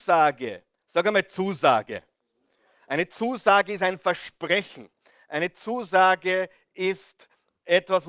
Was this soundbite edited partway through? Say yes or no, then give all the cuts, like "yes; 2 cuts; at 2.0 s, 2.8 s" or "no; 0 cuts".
no; 0 cuts